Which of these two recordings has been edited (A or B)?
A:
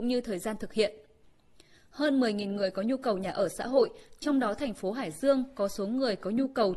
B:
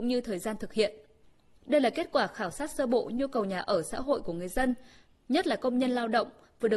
B